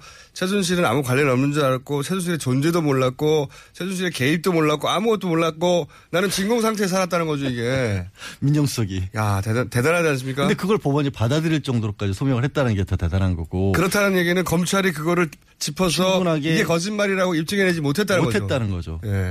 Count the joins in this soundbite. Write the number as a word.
zero